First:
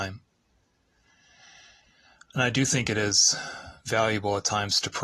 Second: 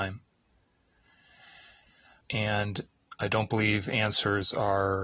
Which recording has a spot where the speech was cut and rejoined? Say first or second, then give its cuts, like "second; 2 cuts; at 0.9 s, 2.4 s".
second; 1 cut; at 2.2 s